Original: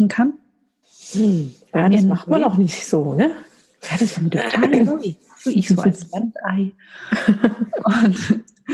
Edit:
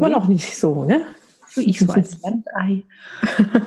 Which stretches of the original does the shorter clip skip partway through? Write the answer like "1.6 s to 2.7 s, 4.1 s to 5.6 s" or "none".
3.7 s to 5.3 s